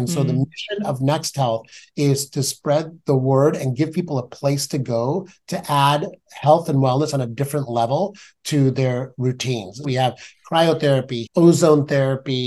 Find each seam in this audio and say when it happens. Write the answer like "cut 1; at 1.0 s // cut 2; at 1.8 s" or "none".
cut 1; at 9.8 s // cut 2; at 11.3 s